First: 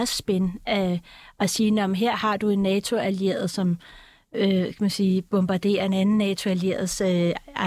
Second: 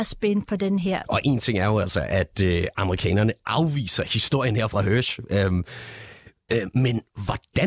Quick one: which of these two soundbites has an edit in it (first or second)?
second